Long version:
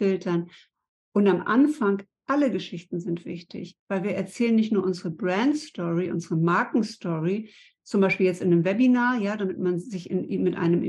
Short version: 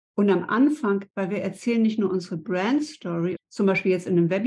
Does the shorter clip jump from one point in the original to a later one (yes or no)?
yes